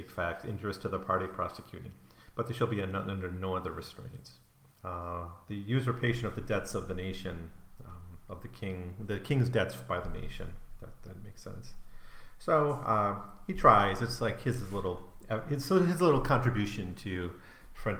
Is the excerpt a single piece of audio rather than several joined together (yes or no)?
no